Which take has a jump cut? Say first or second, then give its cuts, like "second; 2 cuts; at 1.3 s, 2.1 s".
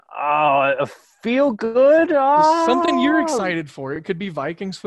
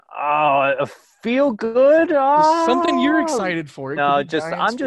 second; 1 cut; at 4.0 s